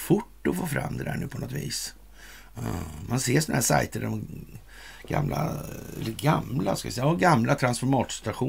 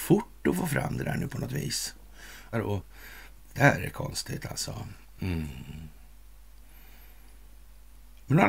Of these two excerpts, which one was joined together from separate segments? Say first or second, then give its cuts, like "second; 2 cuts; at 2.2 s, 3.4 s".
second; 1 cut; at 2.5 s